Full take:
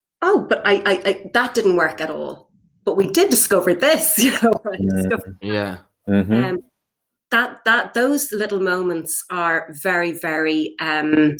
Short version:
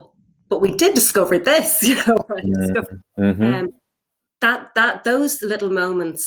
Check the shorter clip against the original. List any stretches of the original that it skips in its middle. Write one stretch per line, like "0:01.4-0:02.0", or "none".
0:05.4-0:05.9